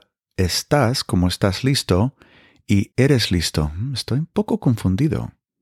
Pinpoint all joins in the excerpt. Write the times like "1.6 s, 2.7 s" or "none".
2.9 s